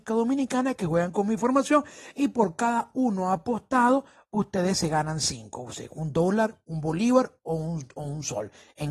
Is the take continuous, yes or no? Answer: yes